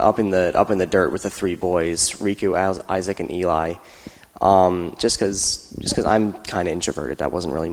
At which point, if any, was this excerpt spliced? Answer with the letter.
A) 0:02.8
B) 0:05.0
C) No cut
B